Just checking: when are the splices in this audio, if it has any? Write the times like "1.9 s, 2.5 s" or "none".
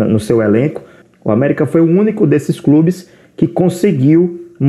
none

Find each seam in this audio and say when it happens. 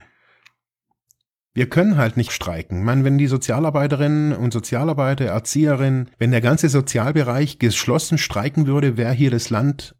2.3 s, 6.1 s

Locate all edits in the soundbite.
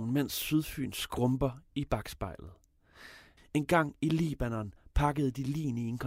3.4 s

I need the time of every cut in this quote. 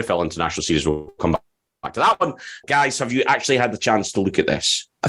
2.6 s

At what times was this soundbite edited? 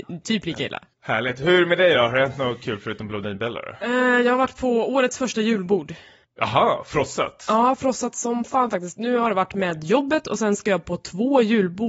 none

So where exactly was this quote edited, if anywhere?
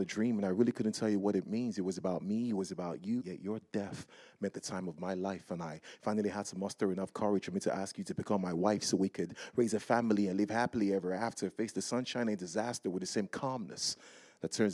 3.2 s

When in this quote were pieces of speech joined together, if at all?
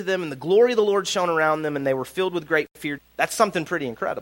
3.0 s

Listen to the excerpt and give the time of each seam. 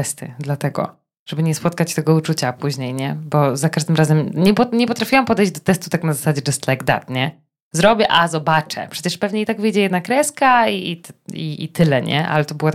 none

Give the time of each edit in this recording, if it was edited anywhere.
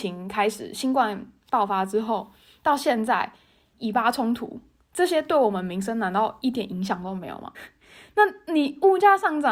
3.7 s, 7.5 s

